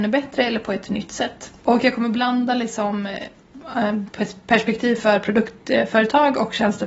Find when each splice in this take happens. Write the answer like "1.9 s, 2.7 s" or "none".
1.6 s